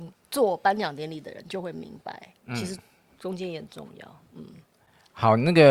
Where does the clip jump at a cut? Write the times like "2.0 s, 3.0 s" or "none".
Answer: none